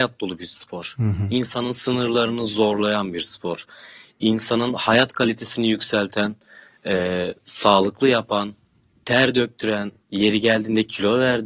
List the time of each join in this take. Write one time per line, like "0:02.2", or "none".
none